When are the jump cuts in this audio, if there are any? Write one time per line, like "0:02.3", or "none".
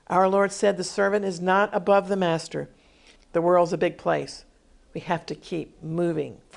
0:03.2